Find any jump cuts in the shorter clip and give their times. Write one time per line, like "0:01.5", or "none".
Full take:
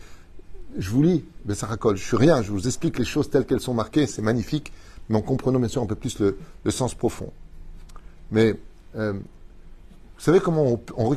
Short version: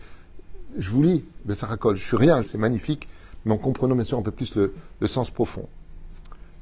0:02.4